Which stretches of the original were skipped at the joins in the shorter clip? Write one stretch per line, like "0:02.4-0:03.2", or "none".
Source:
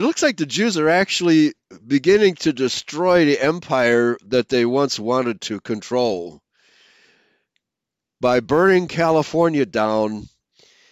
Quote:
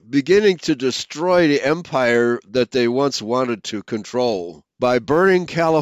0:06.5-0:08.1